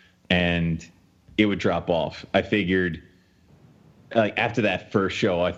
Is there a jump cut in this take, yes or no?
no